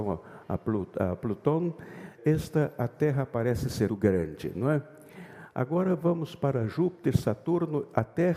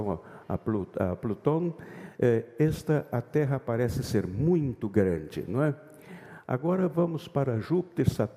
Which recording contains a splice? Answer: first; 2 cuts; at 2.2 s, 3.9 s

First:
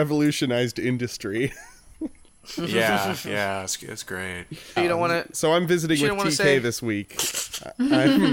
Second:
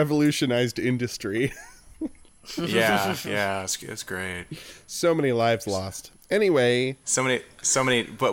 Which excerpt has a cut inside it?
first; 1 cut; at 4.8 s

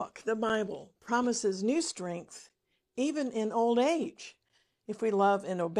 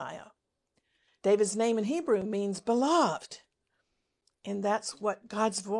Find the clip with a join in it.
second; 1 cut; at 1.1 s

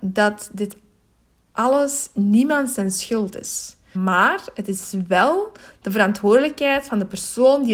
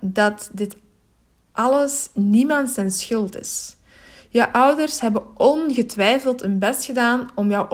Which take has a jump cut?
first; 1 cut; at 3.9 s

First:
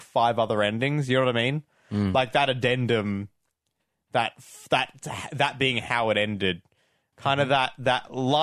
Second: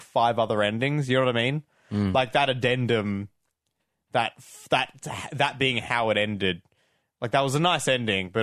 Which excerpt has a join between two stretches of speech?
first; 1 cut; at 7.1 s

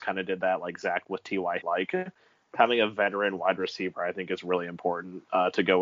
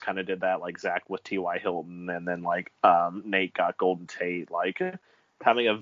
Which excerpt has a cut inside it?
first; 1 cut; at 1.6 s

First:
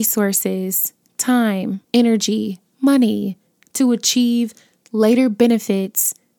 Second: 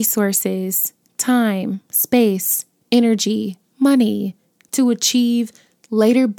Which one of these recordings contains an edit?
first; 1 cut; at 1.8 s

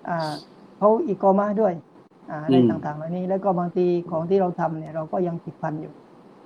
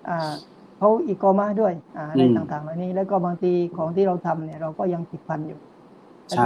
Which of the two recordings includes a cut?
second; 1 cut; at 1.9 s

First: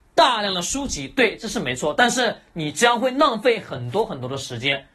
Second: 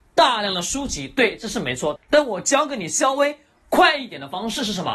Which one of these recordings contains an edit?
second; 1 cut; at 2.0 s

